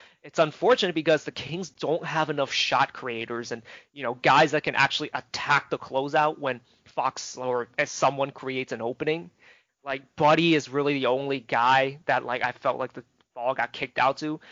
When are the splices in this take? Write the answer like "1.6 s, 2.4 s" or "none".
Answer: 9.7 s